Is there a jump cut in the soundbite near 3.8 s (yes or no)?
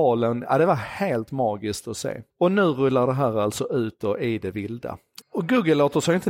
no